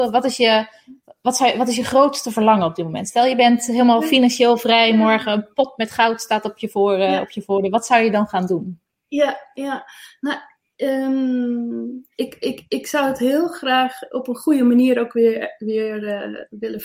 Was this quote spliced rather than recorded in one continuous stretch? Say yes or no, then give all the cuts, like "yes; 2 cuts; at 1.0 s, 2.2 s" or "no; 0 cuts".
yes; 1 cut; at 12.1 s